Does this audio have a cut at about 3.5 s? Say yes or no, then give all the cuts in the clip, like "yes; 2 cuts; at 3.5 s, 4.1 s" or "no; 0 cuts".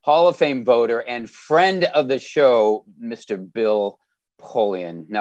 no; 0 cuts